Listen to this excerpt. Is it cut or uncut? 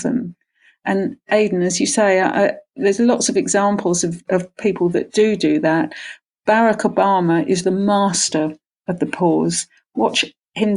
cut